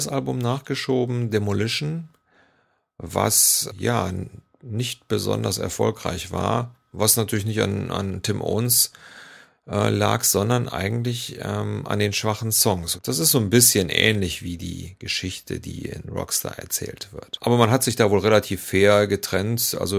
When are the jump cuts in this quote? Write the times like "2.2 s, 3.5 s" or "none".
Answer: 12.9 s